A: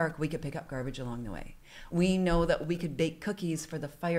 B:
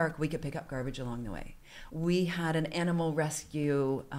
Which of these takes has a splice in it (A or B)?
B